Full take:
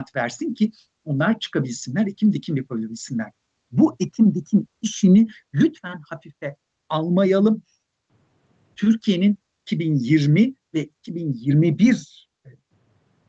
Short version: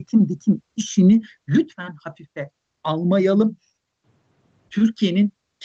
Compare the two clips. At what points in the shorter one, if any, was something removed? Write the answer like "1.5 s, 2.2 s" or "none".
none